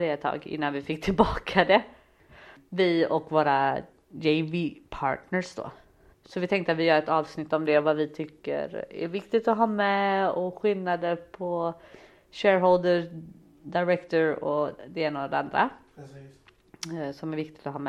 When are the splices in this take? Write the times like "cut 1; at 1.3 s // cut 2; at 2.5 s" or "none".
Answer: cut 1; at 2.5 s // cut 2; at 6.1 s